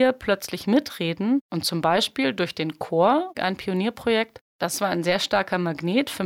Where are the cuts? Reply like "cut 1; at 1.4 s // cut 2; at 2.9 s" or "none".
cut 1; at 3.3 s